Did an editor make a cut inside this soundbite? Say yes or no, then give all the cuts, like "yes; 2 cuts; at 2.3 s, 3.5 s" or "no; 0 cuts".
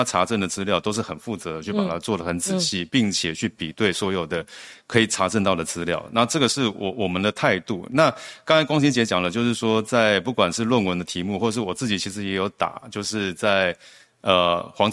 no; 0 cuts